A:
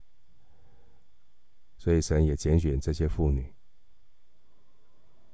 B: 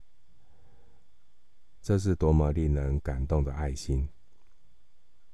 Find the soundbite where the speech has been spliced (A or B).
A